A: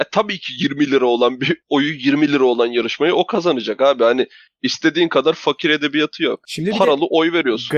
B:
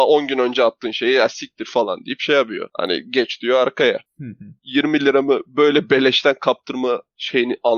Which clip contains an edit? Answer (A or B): B